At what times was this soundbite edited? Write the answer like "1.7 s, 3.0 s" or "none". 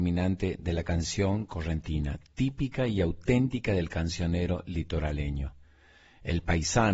none